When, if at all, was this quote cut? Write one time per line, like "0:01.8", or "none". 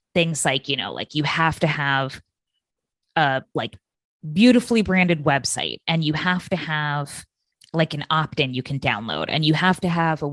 0:07.6